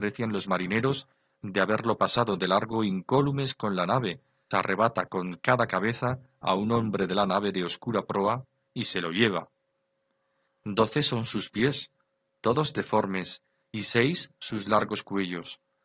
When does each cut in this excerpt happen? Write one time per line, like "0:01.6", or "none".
0:04.5
0:10.5